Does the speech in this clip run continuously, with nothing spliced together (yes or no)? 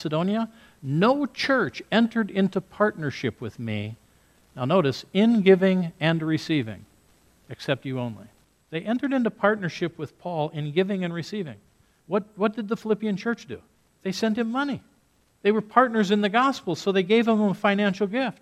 yes